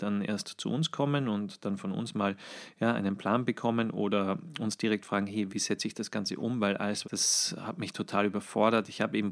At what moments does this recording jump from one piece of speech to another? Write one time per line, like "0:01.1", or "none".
0:05.5
0:07.0